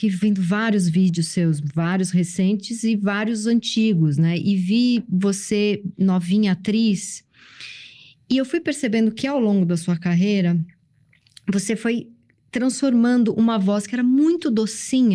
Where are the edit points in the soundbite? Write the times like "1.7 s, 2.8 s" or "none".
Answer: none